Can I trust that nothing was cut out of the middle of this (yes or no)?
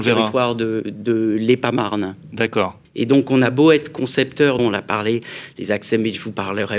no